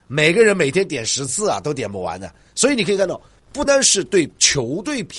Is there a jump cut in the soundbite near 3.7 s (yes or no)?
yes